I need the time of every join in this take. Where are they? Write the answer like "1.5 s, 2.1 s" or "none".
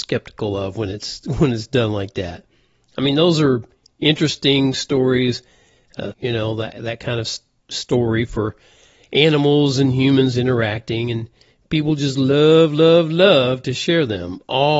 6.1 s